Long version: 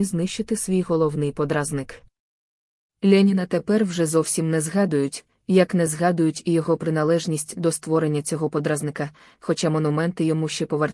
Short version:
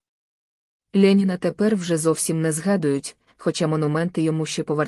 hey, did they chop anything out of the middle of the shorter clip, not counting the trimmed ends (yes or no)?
yes